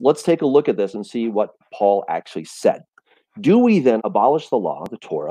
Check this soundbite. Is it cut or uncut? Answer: cut